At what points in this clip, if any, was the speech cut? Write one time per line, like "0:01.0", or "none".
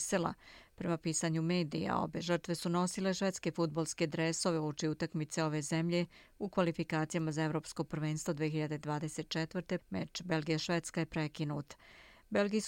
0:09.8

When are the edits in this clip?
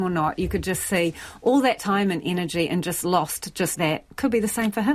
0:03.7

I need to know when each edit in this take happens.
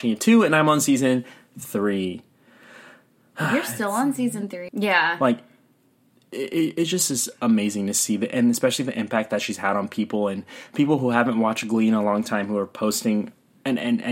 0:04.7

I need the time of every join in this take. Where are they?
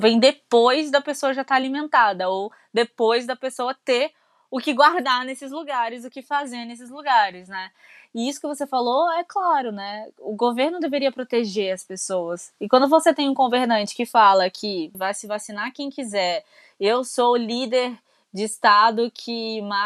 0:14.9

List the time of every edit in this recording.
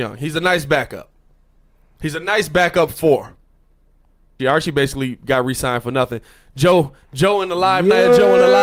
0:04.4

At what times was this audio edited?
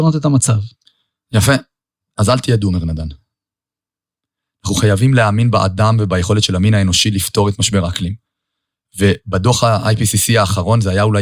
0:04.4

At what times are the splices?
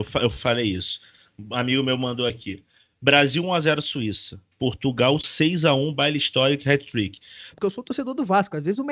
0:04.5
0:07.5

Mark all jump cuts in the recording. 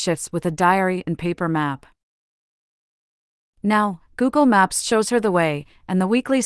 none

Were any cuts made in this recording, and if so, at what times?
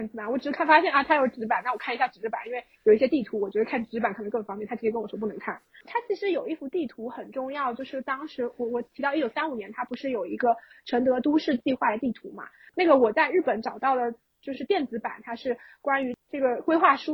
none

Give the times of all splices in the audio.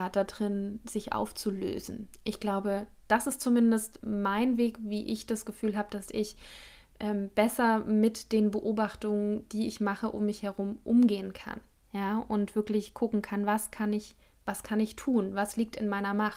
none

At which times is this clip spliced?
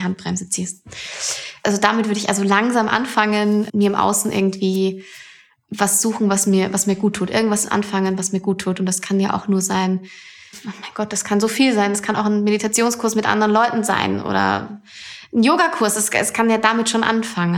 none

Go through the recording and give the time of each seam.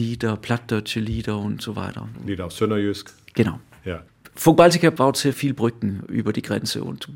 none

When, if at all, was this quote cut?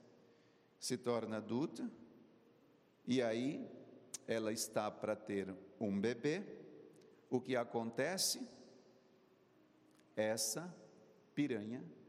0:07.4

